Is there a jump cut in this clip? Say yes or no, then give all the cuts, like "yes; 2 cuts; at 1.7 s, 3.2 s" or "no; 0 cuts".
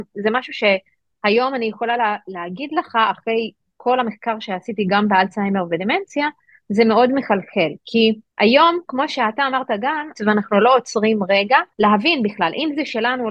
yes; 3 cuts; at 8.3 s, 10.1 s, 11.7 s